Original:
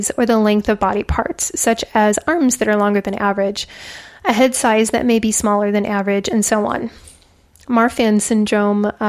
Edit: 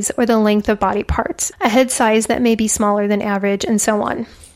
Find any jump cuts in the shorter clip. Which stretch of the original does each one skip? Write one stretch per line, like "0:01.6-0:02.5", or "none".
0:01.5-0:04.2